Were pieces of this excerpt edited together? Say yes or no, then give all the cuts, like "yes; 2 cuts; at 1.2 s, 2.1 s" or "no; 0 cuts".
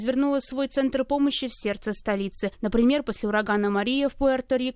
yes; 1 cut; at 2.5 s